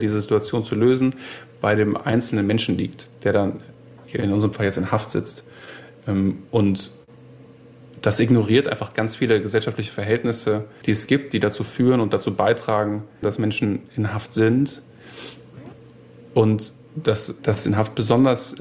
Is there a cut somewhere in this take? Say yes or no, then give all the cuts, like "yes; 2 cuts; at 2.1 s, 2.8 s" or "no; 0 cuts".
yes; 3 cuts; at 10.8 s, 13.2 s, 17.4 s